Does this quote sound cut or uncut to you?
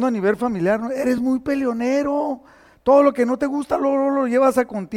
uncut